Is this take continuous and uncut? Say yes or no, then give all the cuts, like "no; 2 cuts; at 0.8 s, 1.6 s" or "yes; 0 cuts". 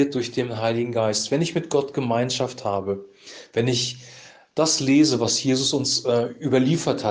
yes; 0 cuts